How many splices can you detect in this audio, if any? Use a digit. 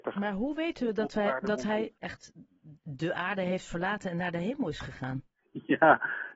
1